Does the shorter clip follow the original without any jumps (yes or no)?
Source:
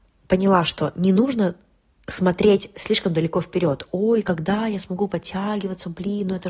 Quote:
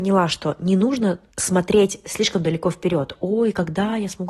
no